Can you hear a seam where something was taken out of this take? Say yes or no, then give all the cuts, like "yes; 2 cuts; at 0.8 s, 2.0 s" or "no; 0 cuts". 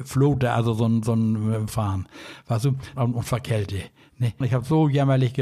yes; 3 cuts; at 1.7 s, 3.0 s, 4.4 s